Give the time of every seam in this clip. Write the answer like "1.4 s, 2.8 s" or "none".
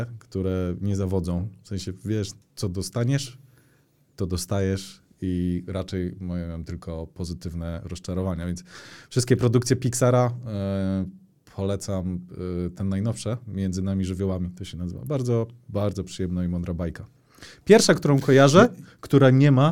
2.4 s